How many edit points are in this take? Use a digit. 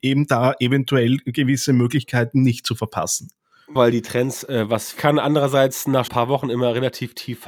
3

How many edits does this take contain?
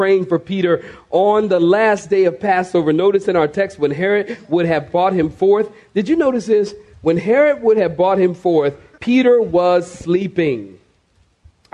1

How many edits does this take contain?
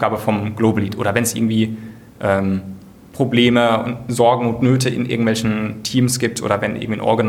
0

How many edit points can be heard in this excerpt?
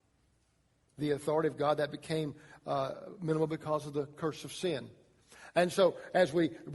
1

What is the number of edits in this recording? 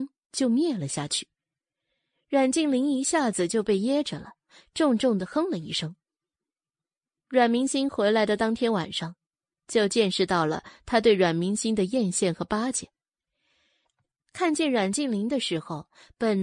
1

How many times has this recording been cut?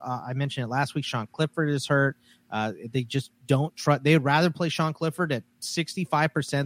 0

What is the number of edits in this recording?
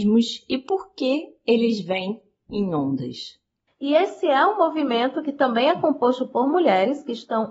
1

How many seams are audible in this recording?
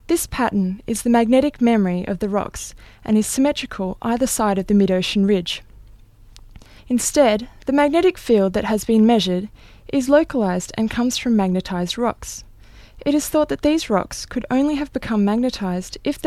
1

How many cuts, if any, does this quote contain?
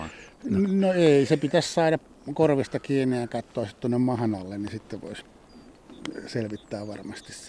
0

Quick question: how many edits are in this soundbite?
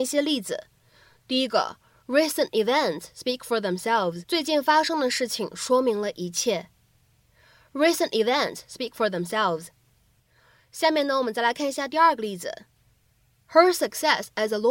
1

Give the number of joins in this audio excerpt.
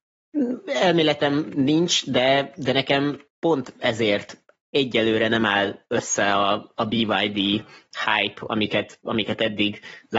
1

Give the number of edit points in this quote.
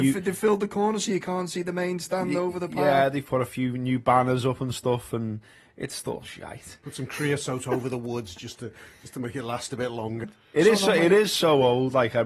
1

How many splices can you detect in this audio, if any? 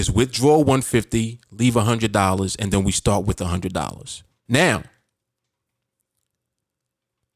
1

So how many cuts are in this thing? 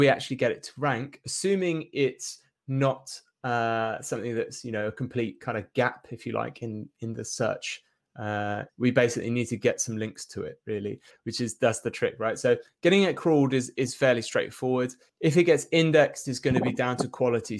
3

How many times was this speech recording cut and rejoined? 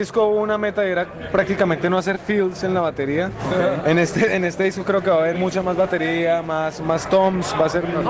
1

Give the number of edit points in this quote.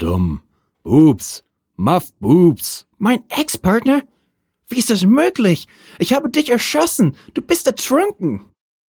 1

